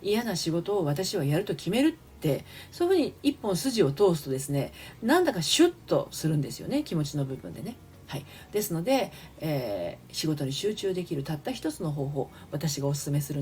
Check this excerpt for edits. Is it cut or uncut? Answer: uncut